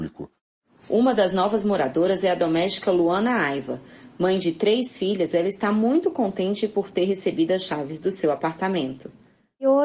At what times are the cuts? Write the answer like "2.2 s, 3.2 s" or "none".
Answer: none

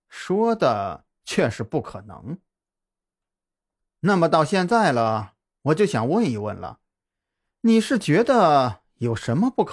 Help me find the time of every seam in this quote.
none

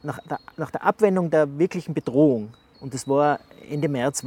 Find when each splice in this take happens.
none

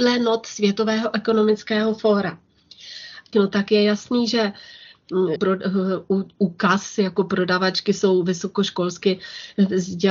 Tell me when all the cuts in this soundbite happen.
3.3 s, 5.4 s

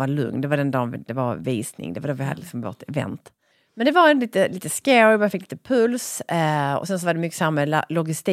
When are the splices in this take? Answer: none

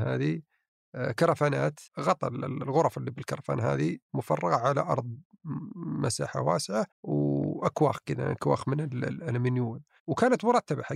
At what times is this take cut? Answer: 1.9 s, 6.9 s

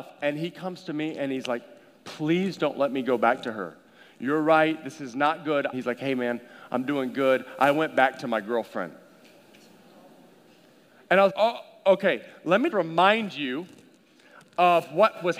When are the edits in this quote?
5.7 s, 11.3 s, 12.7 s

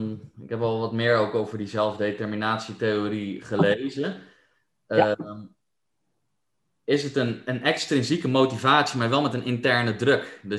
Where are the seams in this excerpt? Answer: none

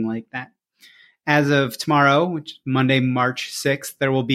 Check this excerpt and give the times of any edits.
none

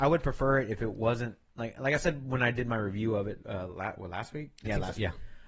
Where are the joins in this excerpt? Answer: none

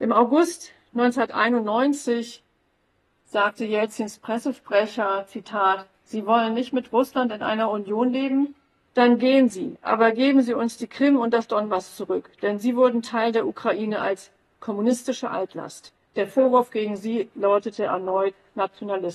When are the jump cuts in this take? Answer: 8.9 s, 16.0 s

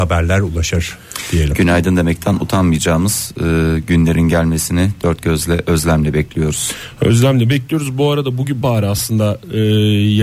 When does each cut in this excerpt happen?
8.6 s

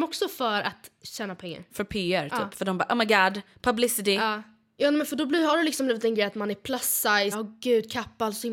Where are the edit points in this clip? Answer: 4.8 s, 7.3 s

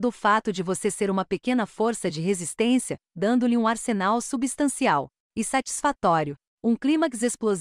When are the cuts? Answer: 3.1 s, 6.5 s

